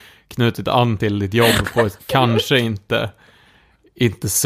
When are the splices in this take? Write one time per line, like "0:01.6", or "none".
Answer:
none